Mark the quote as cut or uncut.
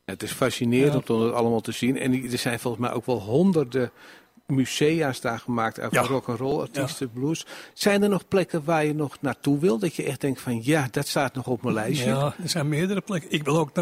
uncut